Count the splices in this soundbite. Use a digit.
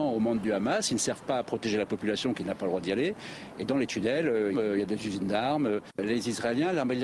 2